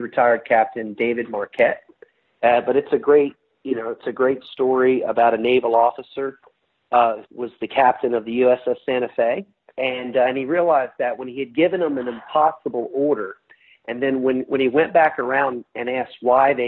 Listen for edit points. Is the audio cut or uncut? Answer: cut